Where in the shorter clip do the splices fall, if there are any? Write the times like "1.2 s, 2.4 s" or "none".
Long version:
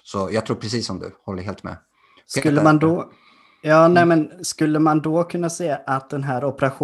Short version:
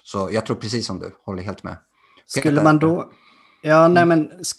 none